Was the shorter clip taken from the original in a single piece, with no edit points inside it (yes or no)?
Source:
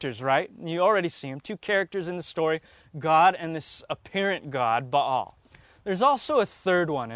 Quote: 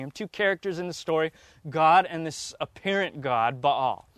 yes